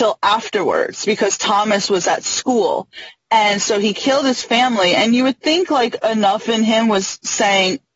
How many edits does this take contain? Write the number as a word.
zero